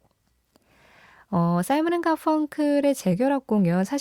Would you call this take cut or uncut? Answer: uncut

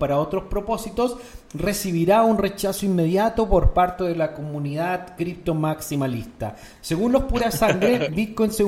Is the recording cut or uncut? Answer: cut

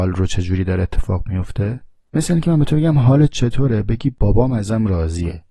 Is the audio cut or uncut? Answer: uncut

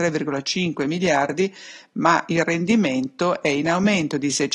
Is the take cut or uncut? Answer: uncut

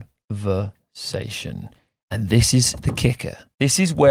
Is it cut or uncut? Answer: uncut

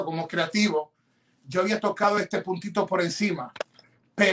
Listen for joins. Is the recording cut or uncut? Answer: uncut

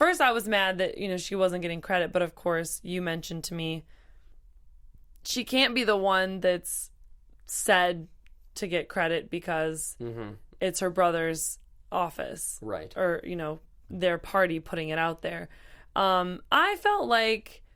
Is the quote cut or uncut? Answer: uncut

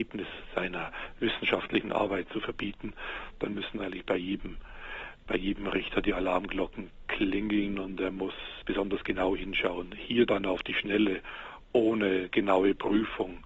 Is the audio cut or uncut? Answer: uncut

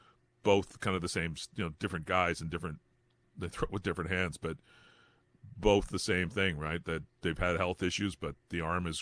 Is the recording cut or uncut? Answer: uncut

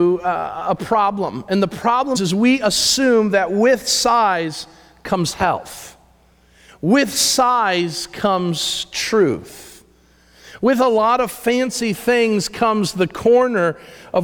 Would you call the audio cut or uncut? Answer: cut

